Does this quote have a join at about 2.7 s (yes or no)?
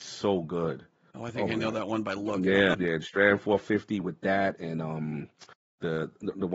yes